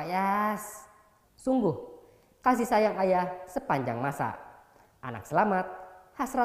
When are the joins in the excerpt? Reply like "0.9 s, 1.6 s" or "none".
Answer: 1.2 s